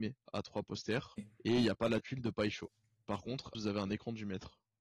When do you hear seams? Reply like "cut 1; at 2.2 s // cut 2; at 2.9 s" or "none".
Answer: cut 1; at 3.5 s